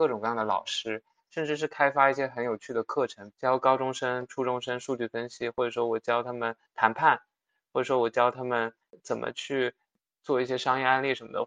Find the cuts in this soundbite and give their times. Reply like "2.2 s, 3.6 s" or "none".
3.3 s